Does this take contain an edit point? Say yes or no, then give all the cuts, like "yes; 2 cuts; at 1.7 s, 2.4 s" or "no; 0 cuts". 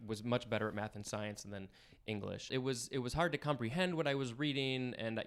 yes; 1 cut; at 2.5 s